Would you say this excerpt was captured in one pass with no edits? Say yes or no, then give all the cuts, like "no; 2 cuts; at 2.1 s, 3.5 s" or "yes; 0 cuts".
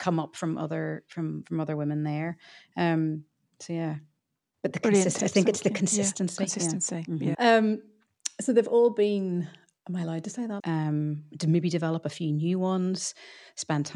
no; 2 cuts; at 7.3 s, 10.6 s